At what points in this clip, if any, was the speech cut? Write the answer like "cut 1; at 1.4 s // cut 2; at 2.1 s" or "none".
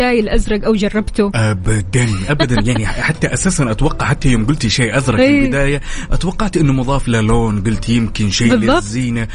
cut 1; at 2.3 s